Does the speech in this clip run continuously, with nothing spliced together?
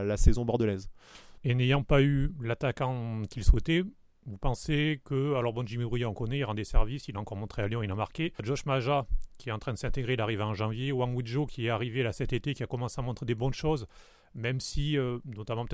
yes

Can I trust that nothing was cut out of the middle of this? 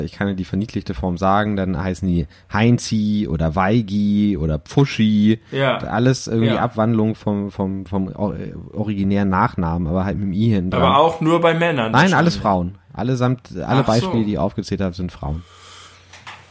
yes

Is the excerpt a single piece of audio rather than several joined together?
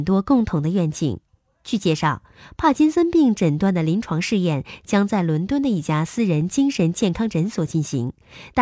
no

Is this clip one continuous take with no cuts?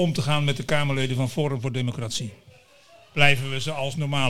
yes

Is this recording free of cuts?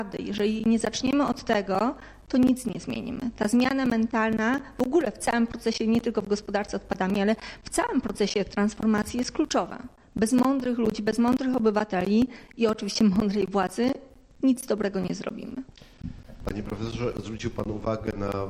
yes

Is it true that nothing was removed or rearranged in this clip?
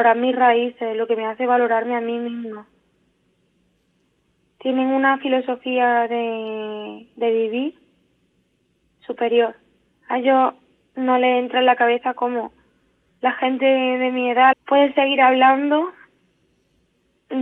no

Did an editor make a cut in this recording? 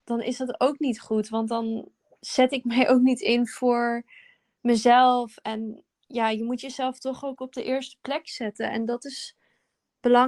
no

